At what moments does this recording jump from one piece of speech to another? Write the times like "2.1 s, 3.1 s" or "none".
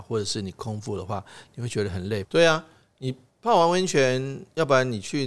2.2 s